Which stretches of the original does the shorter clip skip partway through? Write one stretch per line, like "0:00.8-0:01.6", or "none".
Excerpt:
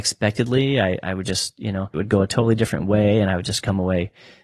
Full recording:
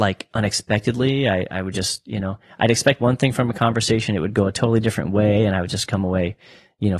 0:02.4-0:04.2